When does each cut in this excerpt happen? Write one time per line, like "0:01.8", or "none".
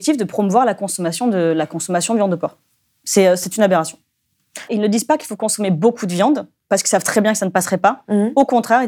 0:04.7